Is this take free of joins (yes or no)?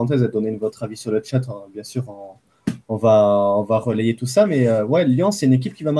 yes